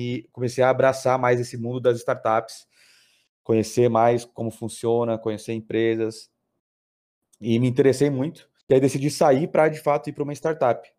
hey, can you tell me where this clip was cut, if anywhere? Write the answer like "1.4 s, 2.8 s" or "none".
8.6 s